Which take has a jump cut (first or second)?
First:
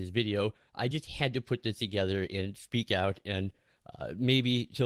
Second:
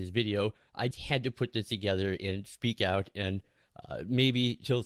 second